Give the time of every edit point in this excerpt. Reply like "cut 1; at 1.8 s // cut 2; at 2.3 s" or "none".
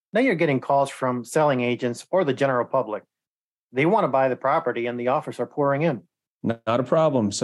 cut 1; at 6.3 s